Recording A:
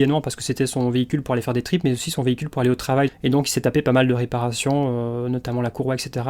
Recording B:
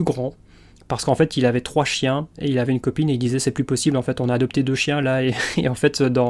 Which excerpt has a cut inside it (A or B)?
A